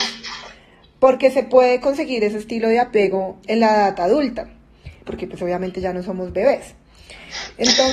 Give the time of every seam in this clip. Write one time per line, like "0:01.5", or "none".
0:03.4
0:05.1